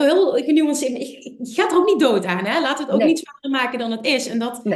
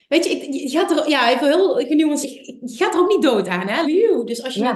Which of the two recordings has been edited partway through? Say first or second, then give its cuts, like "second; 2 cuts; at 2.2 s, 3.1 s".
second; 2 cuts; at 2.2 s, 3.8 s